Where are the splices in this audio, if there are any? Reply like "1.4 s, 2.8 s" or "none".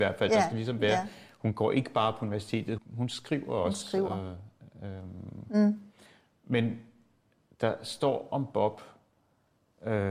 2.8 s